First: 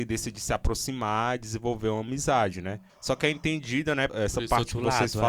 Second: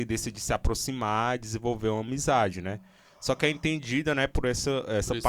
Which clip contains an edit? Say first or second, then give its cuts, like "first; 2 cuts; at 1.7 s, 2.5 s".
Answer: first; 2 cuts; at 2.9 s, 4.1 s